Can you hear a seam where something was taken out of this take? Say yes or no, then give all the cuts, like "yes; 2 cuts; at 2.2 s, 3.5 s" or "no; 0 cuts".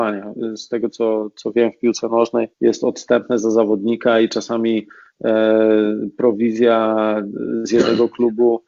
yes; 1 cut; at 2.5 s